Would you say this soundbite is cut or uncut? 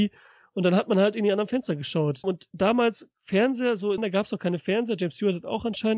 cut